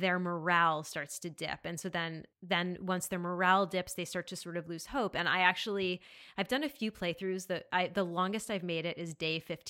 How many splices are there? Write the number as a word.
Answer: one